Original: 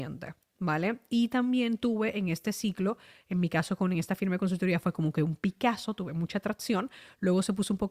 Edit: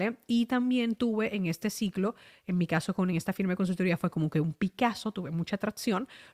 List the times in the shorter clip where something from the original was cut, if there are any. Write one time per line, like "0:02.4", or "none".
none